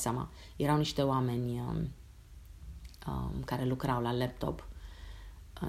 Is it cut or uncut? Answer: uncut